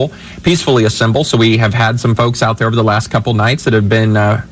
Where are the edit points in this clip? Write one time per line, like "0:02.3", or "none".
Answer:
none